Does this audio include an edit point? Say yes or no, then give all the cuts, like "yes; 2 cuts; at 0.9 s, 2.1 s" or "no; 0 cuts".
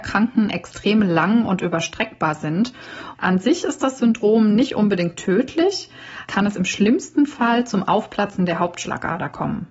yes; 2 cuts; at 3.1 s, 6.3 s